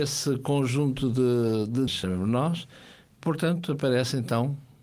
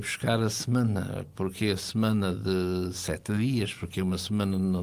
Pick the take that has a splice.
first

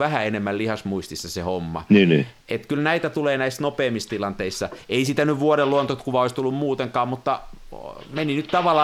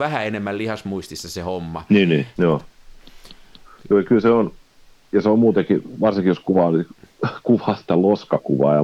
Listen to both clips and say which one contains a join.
second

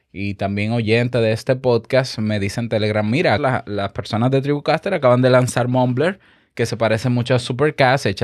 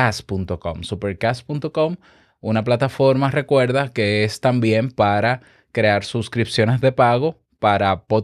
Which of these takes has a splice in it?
first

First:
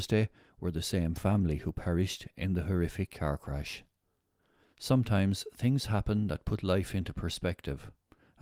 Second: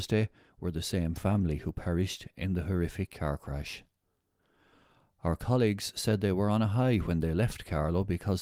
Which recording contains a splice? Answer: first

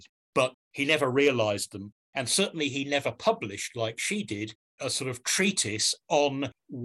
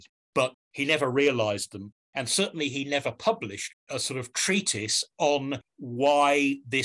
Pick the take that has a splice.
second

